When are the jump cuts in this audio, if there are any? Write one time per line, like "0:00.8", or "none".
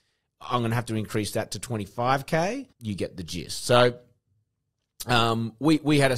0:02.7